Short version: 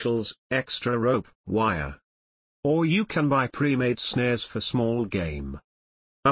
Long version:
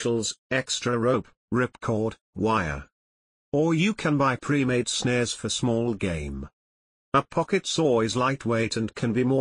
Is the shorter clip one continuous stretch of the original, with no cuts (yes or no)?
no